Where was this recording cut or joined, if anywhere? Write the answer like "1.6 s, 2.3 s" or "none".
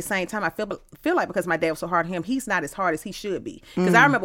none